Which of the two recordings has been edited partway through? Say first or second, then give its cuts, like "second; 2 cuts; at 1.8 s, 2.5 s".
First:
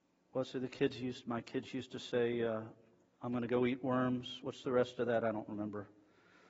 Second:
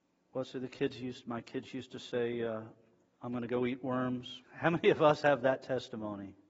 second; 1 cut; at 4.4 s